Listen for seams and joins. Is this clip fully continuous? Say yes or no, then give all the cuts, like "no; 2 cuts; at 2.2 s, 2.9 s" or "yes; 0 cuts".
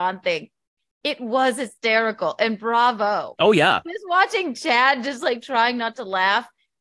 no; 1 cut; at 3.4 s